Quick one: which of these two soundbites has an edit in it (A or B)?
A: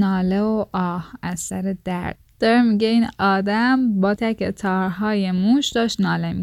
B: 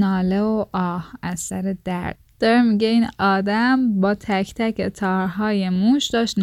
A